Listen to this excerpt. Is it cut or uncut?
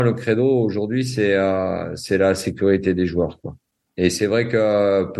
cut